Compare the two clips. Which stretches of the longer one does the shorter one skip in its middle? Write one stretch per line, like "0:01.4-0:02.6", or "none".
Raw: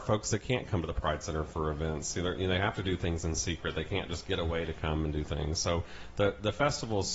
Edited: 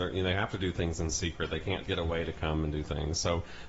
0:04.1-0:04.2